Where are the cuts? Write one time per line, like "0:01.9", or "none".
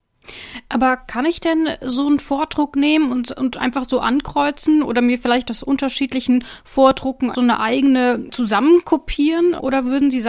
0:07.3